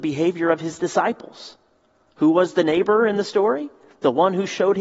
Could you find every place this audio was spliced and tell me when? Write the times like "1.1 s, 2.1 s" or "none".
none